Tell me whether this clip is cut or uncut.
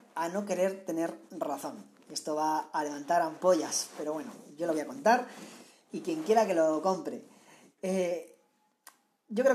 uncut